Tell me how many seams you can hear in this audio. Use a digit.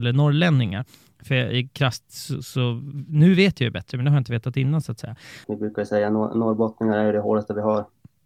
1